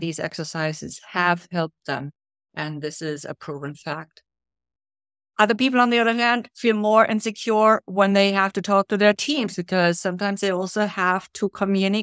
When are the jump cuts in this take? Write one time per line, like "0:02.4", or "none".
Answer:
none